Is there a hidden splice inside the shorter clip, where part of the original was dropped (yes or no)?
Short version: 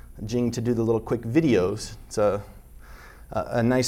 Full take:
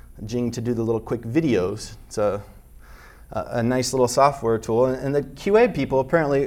no